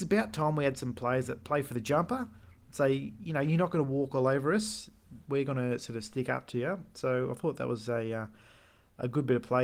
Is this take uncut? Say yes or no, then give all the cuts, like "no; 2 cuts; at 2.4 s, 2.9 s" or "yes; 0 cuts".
yes; 0 cuts